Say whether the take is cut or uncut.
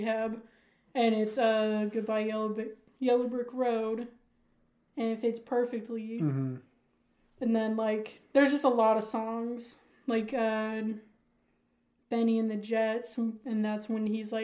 uncut